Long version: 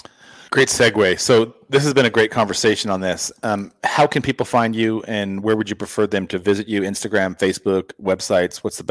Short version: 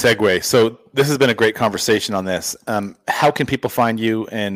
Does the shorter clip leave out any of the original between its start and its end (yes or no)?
no